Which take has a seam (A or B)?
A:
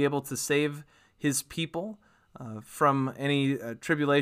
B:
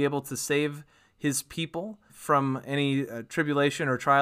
B